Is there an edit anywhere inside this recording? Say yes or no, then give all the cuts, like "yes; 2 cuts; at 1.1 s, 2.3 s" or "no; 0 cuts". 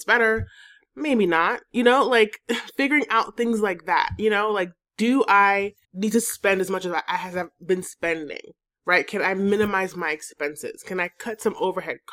no; 0 cuts